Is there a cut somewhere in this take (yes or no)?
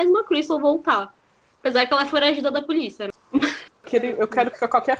no